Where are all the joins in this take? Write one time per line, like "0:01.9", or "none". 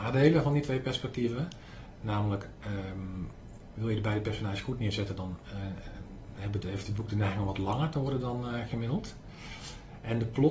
none